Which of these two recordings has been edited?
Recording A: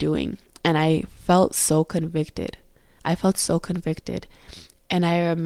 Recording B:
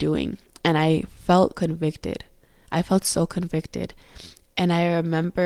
B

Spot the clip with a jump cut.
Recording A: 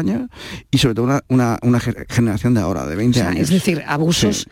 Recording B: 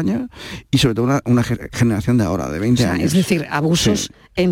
B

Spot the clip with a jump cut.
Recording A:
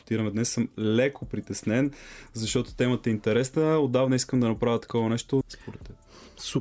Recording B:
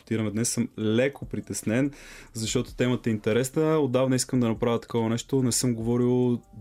A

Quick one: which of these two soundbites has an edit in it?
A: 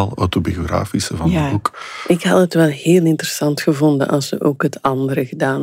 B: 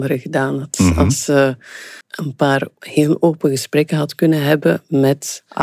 B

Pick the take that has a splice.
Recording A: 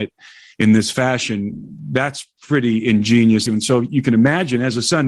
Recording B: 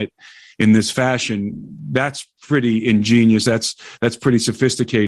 A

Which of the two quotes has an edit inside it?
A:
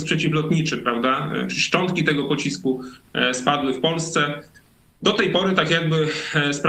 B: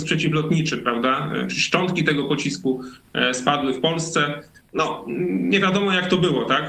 B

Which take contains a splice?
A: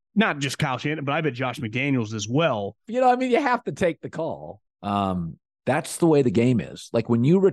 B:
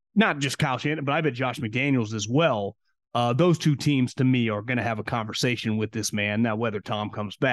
A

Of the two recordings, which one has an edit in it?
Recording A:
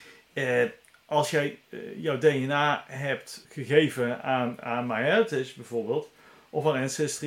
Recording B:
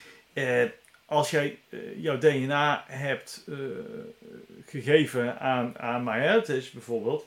A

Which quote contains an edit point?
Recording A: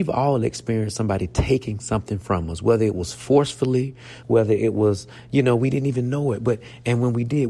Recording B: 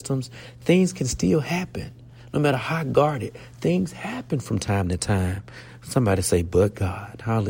A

